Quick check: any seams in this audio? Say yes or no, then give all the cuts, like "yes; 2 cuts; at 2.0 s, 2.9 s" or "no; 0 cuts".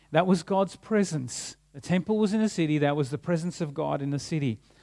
no; 0 cuts